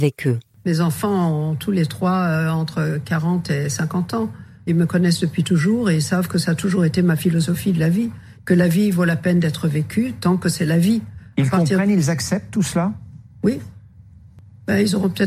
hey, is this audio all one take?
yes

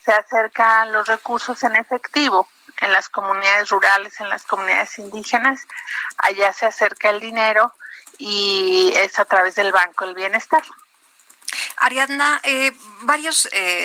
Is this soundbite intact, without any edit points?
yes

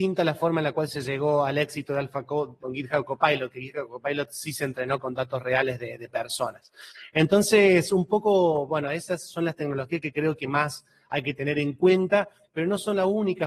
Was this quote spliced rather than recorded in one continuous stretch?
no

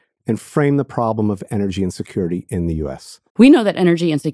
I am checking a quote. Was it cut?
yes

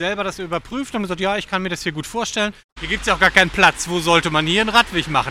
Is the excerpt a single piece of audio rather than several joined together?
no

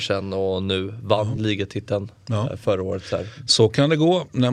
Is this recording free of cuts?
yes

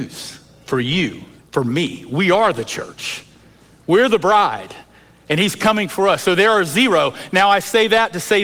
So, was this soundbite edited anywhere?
yes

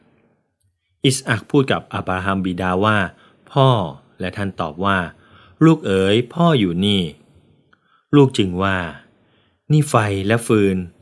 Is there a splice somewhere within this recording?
no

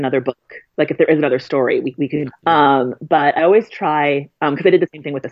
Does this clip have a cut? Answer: yes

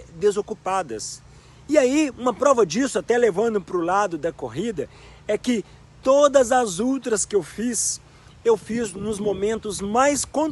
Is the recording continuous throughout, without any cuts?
yes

